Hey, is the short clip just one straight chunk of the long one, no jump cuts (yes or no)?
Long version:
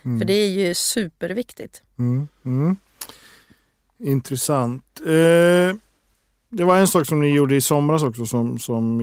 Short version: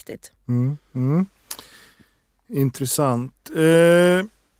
yes